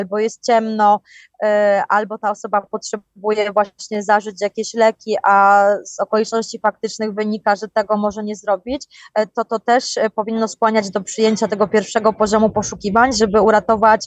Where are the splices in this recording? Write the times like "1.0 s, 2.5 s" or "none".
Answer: none